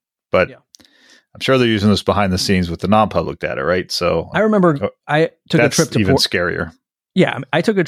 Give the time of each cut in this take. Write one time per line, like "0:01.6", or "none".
none